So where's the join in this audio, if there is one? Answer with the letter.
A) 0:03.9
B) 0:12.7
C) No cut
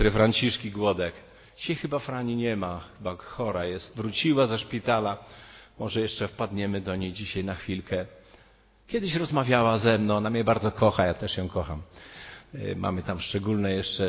A